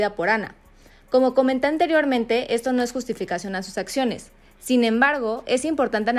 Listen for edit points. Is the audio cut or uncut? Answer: uncut